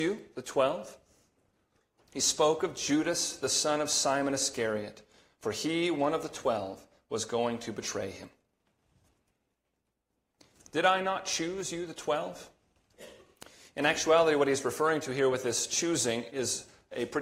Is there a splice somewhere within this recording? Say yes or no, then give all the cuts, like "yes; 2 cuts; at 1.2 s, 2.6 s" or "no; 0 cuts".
yes; 1 cut; at 2.0 s